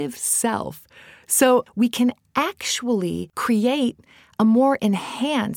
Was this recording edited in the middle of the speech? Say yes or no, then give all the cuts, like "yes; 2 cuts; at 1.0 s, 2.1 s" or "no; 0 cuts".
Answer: yes; 1 cut; at 1.7 s